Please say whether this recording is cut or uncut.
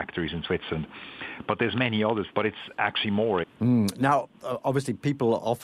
cut